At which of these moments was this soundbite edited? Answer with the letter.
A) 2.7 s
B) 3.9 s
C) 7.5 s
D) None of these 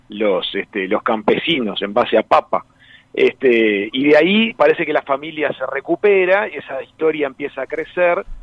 D